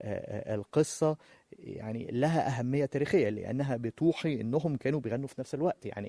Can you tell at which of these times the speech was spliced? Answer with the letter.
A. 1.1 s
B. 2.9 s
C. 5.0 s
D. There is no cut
D